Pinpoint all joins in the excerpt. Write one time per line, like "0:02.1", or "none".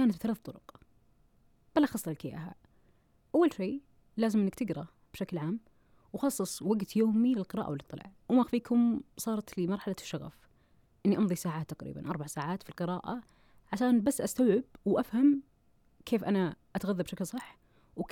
0:08.2